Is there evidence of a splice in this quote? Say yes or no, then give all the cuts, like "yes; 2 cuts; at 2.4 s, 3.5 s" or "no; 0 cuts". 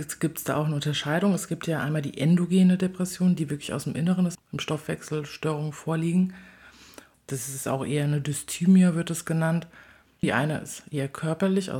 yes; 3 cuts; at 4.4 s, 7.1 s, 10.2 s